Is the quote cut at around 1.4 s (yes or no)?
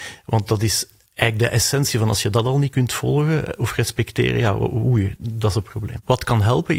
no